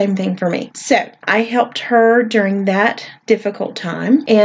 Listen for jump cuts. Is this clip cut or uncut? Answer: uncut